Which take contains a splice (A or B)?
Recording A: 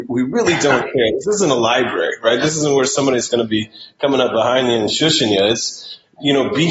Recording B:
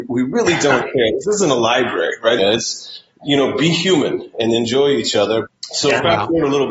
B